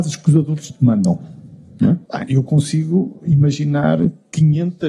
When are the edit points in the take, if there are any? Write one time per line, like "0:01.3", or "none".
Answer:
0:02.1